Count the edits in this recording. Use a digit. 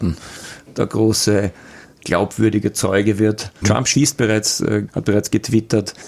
2